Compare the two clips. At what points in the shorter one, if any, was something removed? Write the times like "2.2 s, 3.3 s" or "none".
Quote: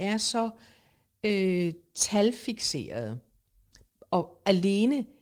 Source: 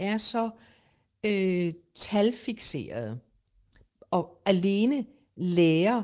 none